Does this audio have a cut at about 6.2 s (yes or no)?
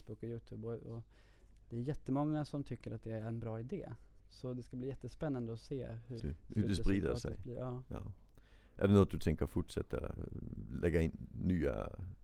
yes